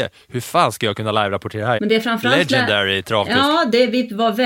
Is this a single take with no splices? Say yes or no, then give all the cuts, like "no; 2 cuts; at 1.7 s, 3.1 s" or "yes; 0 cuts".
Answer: no; 1 cut; at 1.8 s